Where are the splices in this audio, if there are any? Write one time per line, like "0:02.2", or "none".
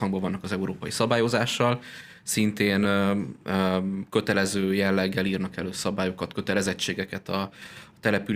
none